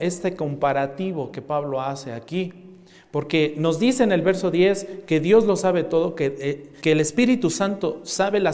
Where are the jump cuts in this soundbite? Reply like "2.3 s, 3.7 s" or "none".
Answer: 6.8 s